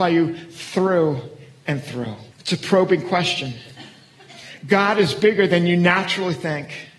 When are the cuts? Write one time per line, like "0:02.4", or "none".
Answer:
0:02.3